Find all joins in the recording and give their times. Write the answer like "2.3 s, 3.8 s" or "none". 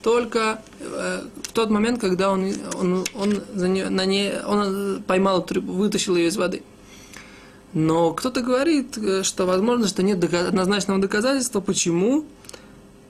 none